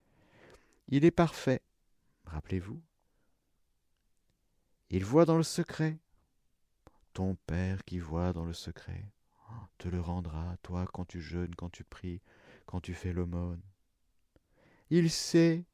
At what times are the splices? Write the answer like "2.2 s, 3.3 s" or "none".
none